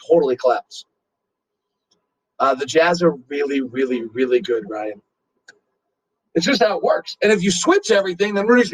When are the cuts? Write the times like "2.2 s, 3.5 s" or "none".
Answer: 6.2 s